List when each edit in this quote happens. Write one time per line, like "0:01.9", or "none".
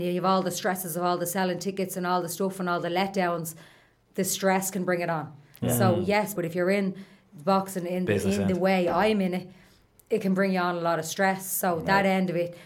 0:06.3